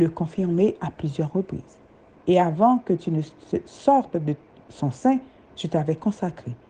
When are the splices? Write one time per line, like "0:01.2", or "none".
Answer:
0:02.1